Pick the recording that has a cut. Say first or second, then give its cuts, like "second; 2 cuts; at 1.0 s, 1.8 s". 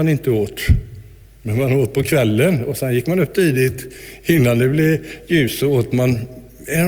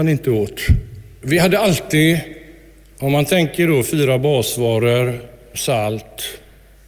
second; 2 cuts; at 1.2 s, 5.5 s